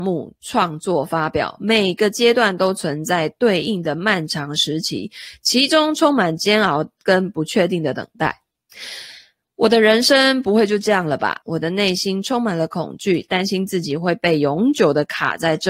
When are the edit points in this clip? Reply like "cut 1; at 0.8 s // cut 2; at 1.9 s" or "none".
cut 1; at 11.4 s